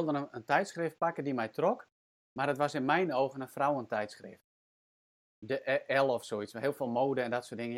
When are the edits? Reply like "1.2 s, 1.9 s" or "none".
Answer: none